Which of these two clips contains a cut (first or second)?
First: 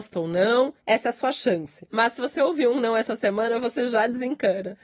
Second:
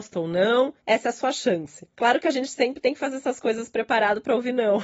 first